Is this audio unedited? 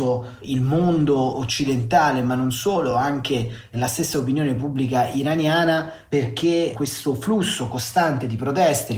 yes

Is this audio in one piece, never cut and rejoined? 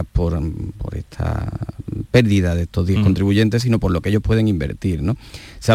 yes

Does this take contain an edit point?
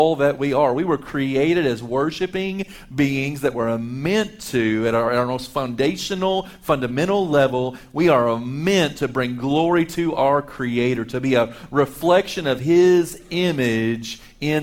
no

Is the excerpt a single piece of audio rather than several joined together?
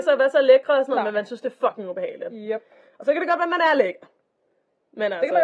yes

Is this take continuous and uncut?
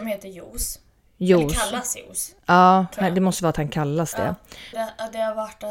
no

